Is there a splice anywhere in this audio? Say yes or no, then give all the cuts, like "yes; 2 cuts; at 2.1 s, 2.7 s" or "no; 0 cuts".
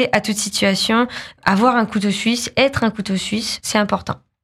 no; 0 cuts